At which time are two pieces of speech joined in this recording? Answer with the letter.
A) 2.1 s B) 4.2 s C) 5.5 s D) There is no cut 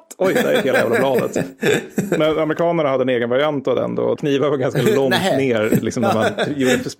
B